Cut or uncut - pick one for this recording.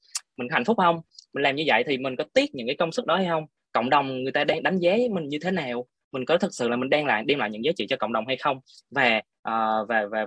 uncut